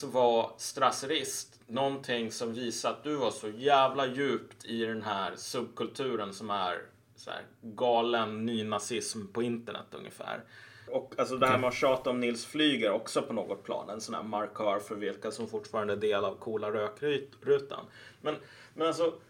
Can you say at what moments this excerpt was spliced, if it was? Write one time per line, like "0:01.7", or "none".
0:10.9